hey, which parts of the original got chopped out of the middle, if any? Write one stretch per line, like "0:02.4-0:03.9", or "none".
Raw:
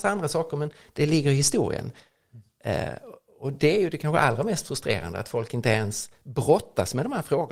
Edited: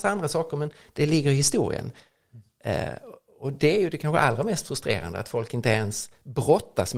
none